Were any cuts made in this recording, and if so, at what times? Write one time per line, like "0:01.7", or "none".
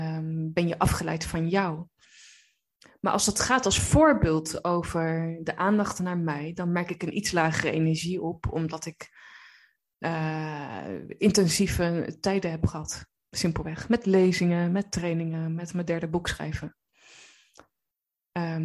none